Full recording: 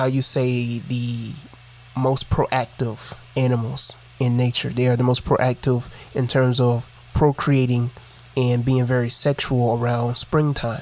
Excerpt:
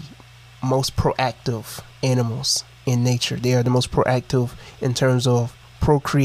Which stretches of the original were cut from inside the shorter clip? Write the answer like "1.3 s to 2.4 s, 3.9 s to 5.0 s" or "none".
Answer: none